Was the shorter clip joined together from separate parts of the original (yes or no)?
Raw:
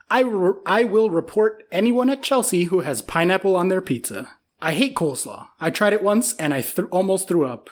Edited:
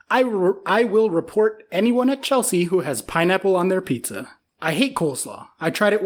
no